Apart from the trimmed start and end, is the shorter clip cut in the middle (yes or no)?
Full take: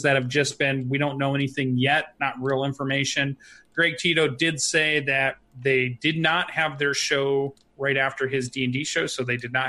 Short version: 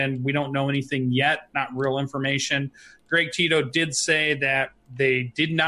no